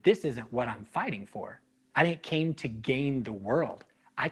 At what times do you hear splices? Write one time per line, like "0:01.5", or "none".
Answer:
0:01.9